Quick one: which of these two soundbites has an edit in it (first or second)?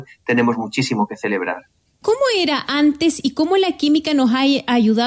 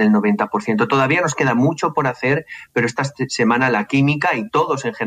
first